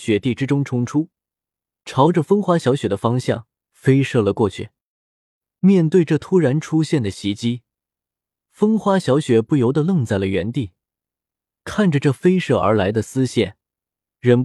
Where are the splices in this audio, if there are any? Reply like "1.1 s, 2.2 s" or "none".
none